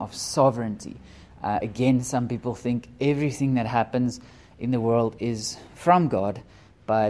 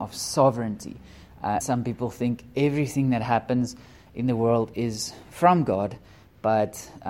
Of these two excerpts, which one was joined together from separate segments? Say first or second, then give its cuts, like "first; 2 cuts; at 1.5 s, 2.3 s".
second; 1 cut; at 1.6 s